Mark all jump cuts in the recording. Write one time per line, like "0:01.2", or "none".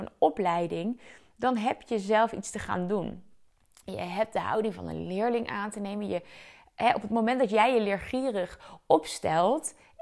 none

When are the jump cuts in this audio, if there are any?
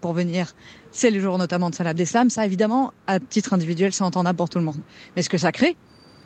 none

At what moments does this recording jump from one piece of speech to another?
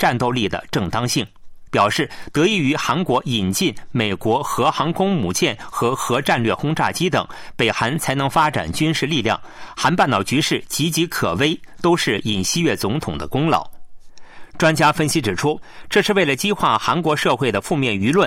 0:01.7

